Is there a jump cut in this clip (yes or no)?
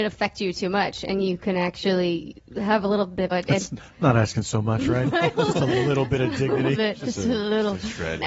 yes